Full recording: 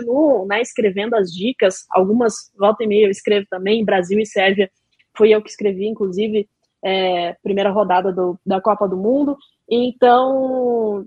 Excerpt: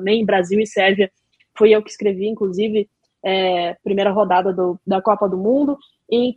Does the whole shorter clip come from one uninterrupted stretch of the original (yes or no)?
yes